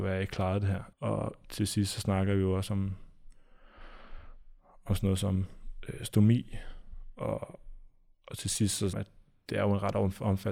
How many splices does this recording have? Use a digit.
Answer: 2